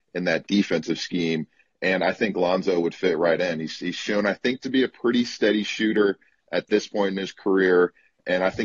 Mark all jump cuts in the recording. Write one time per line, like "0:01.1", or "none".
none